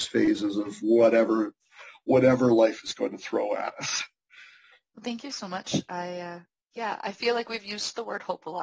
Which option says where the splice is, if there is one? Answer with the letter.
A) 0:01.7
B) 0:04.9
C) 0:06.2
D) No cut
B